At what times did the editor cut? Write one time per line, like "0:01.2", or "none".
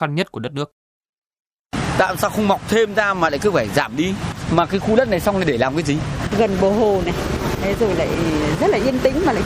0:06.3